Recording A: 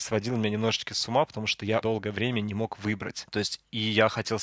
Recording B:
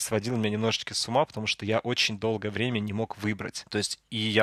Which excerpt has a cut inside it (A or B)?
A